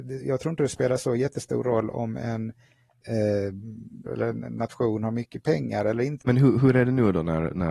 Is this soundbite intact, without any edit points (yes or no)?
no